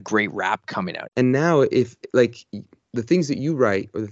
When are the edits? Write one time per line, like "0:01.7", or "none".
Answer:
0:01.1